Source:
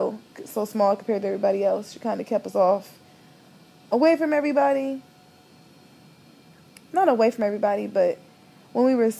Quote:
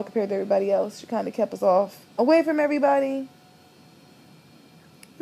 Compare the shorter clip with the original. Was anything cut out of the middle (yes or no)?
yes